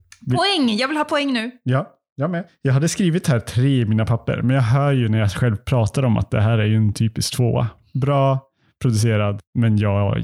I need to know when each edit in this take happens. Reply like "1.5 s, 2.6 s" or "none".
none